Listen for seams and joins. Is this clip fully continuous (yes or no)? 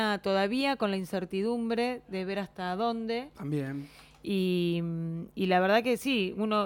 yes